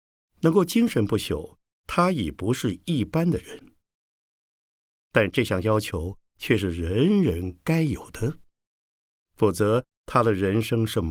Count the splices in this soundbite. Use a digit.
0